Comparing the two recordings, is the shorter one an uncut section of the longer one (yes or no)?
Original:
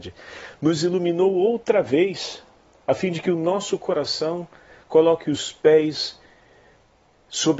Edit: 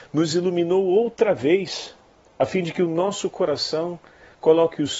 yes